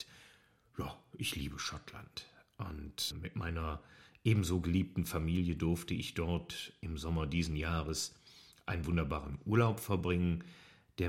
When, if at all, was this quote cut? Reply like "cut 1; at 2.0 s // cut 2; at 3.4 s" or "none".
cut 1; at 3.1 s

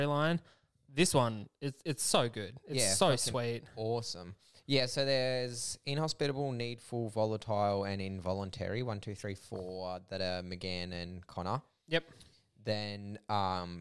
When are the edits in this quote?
none

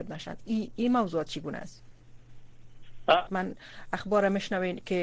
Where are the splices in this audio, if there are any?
cut 1; at 3.3 s

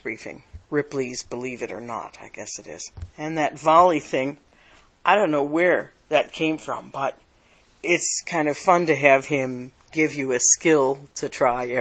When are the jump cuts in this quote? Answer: none

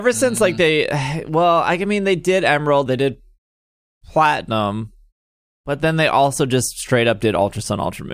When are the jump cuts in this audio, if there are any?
cut 1; at 2.9 s

